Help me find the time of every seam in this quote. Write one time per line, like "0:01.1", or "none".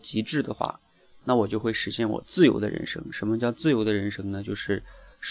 none